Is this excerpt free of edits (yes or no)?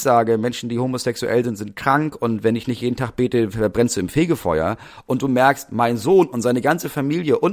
yes